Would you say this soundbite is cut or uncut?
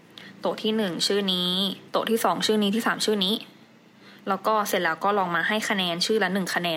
cut